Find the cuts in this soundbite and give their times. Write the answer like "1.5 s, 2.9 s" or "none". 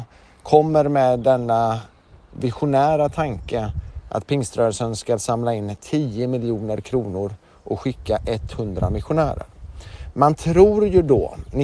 none